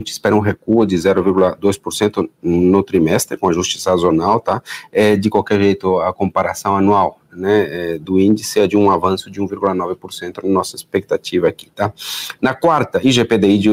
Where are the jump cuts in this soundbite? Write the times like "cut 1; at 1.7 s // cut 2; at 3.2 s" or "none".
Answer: none